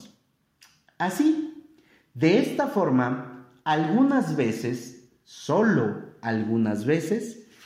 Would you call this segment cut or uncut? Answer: uncut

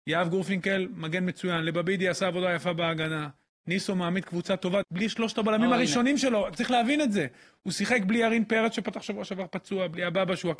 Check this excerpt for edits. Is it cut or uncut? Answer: cut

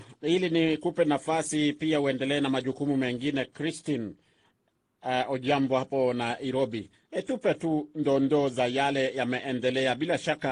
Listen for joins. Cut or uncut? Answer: uncut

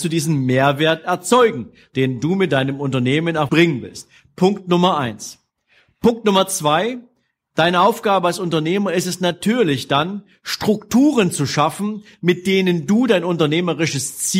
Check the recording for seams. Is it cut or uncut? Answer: cut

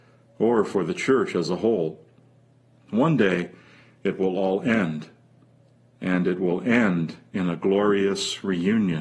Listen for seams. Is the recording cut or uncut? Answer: uncut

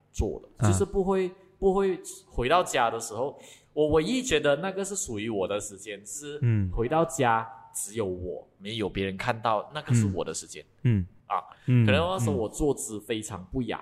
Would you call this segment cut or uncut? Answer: cut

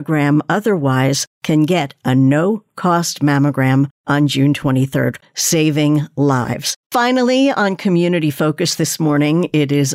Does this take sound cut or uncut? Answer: cut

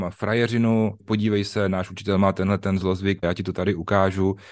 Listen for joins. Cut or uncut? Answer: cut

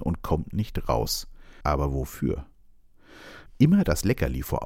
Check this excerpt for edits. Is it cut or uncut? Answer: cut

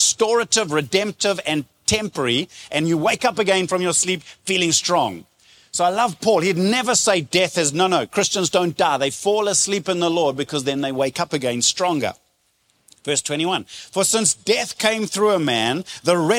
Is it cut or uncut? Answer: uncut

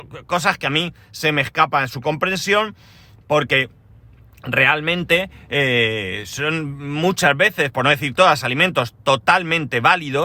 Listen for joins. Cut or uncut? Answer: uncut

